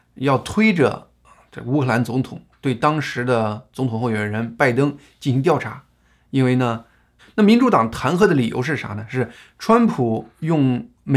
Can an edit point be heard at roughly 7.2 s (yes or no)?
yes